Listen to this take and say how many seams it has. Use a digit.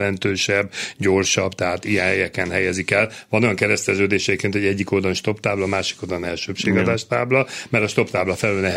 0